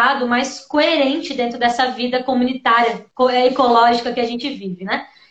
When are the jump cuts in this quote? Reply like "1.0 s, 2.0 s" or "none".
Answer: none